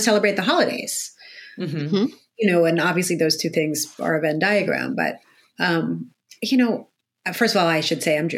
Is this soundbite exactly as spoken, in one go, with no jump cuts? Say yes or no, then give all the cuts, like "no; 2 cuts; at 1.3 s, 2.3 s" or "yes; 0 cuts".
yes; 0 cuts